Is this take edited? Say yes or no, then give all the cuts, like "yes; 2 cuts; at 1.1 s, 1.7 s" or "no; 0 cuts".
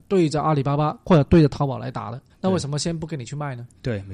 yes; 1 cut; at 2.3 s